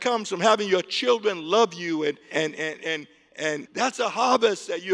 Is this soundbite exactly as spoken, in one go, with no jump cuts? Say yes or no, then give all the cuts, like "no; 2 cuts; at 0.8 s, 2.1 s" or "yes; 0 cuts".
no; 2 cuts; at 2.3 s, 3.6 s